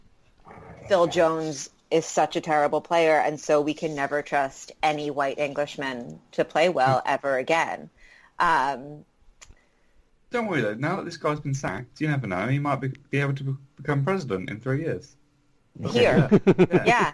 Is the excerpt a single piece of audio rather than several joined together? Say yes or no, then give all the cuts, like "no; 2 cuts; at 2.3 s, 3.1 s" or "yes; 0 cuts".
yes; 0 cuts